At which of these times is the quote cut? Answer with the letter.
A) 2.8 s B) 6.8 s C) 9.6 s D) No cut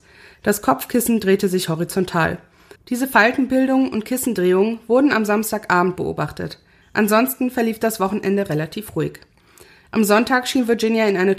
A